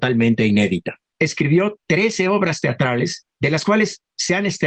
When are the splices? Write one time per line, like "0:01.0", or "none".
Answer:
none

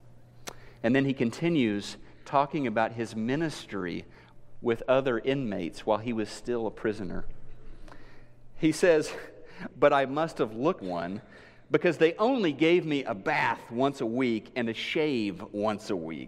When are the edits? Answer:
0:09.7
0:10.8

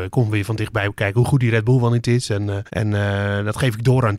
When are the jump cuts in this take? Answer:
0:02.7

